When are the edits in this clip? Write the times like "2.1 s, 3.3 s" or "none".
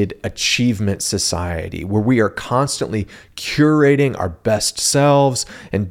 none